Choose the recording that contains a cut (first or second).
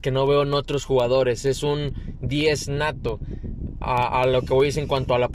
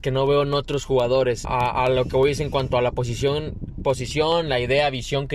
second